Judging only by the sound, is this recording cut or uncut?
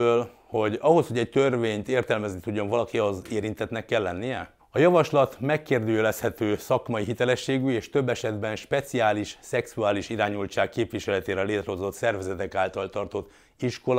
cut